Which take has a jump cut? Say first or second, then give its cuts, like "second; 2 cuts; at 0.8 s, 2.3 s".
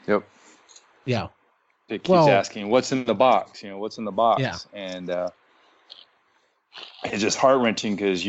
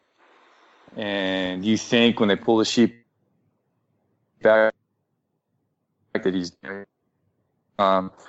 first; 1 cut; at 1.9 s